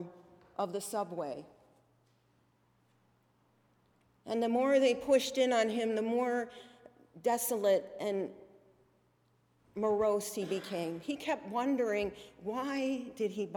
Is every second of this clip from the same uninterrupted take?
yes; 0 cuts

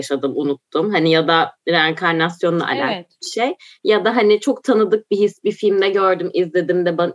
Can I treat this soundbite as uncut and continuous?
yes; 0 cuts

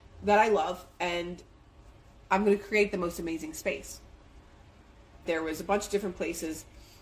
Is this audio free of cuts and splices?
no; 1 cut; at 5.3 s

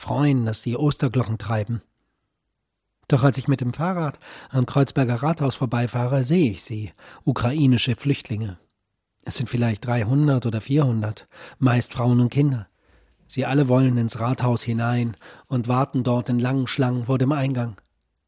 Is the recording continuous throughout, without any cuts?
yes; 0 cuts

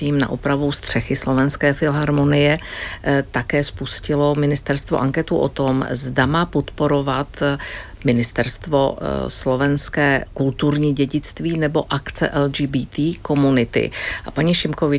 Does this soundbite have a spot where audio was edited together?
no; 0 cuts

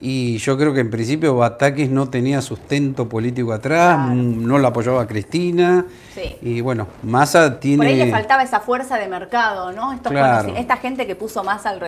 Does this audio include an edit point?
no; 0 cuts

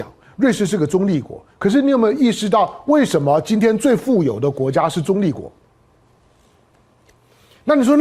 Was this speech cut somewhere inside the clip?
no; 0 cuts

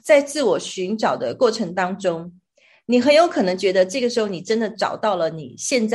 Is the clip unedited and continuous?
yes; 0 cuts

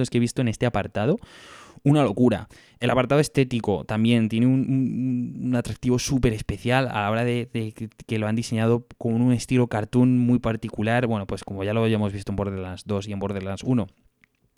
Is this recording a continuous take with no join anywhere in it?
yes; 0 cuts

